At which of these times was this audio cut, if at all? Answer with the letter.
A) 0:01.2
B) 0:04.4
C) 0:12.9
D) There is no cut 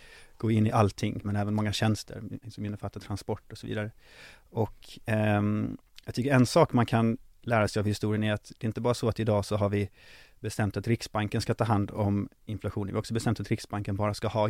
A